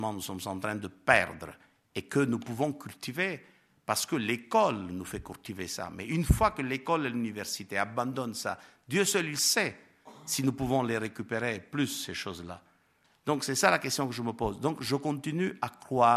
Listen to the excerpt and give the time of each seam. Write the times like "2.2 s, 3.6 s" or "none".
none